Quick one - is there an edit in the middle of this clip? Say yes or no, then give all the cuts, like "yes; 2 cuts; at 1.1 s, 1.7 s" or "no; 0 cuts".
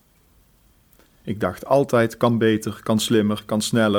yes; 1 cut; at 1.0 s